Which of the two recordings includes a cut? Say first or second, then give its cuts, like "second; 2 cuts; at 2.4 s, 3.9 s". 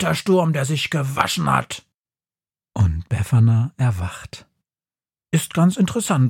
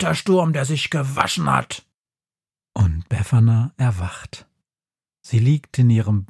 first; 1 cut; at 5.2 s